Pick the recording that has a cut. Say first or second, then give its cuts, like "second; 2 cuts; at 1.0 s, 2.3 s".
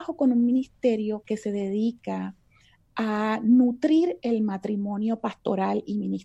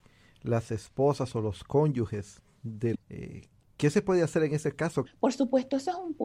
second; 2 cuts; at 2.9 s, 5.1 s